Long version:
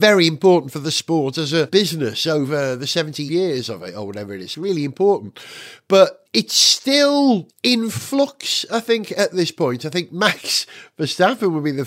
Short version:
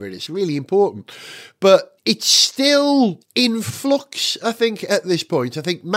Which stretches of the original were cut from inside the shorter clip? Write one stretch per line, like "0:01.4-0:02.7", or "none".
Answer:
none